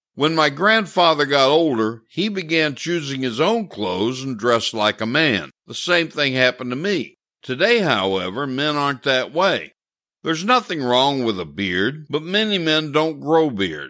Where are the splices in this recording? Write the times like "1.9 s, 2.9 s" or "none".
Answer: 5.6 s, 7.4 s

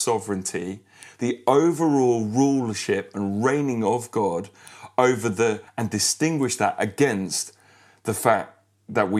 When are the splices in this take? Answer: 5.7 s

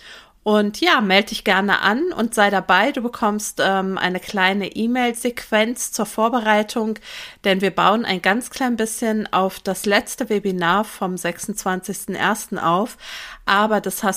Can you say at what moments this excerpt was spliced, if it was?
none

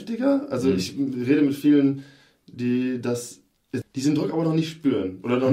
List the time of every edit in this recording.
3.8 s

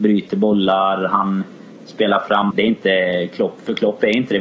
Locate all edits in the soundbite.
2.5 s

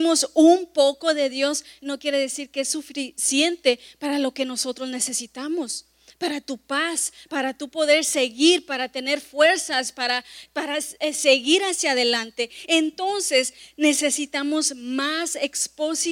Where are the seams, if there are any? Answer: 7.3 s

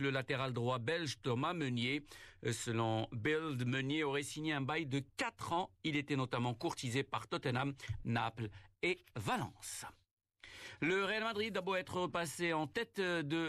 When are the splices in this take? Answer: 8.0 s

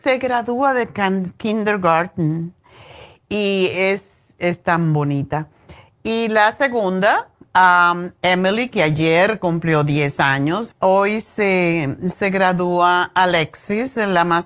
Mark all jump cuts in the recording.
10.7 s

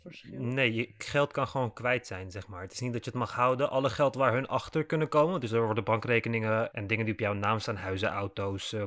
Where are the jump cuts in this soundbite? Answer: 6.7 s

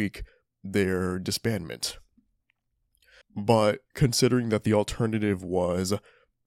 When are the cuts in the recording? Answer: 3.2 s

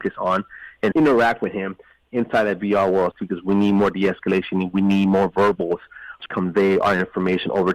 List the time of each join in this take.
3.1 s, 6.3 s

